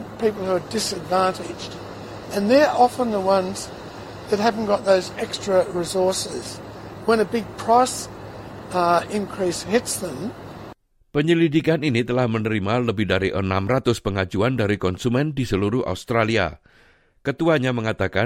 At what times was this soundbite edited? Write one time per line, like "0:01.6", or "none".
none